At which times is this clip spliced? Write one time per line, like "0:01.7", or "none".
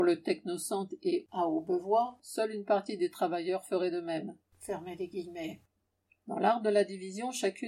0:04.5